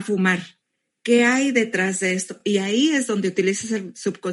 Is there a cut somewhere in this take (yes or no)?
no